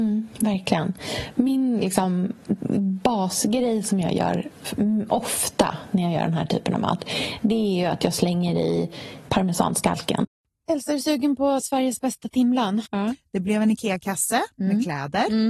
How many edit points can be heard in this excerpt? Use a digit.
2